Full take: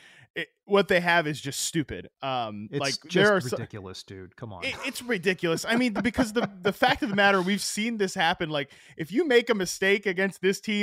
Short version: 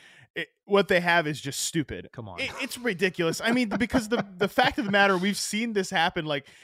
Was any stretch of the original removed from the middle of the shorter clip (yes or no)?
yes